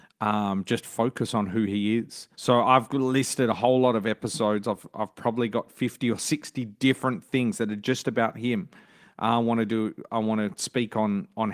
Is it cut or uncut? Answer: cut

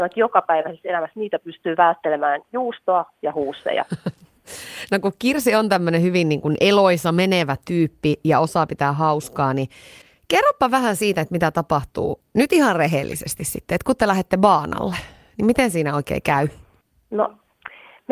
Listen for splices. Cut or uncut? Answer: uncut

